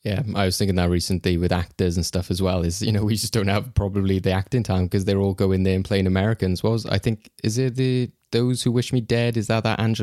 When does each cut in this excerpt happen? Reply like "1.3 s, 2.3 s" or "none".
none